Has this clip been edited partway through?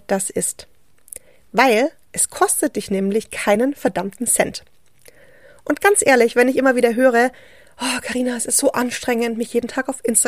no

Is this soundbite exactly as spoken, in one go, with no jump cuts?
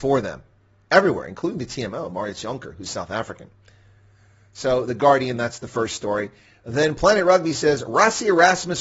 yes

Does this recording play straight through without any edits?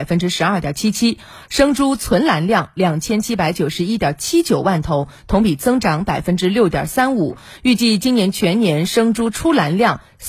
yes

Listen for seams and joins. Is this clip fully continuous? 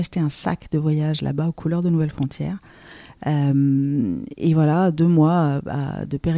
yes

